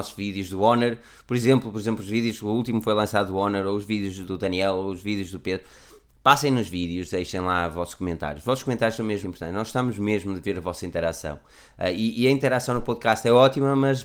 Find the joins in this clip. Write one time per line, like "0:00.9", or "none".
0:04.2
0:09.2